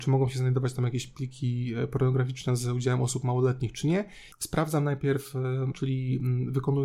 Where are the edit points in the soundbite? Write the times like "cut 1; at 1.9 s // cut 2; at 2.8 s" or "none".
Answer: cut 1; at 4.3 s // cut 2; at 5.7 s